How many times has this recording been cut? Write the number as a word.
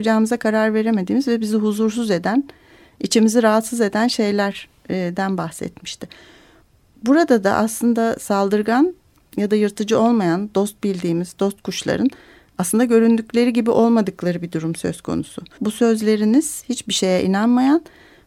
one